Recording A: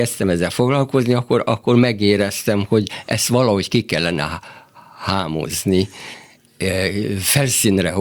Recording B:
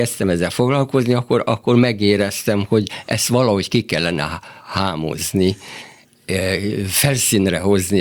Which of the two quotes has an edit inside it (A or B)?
B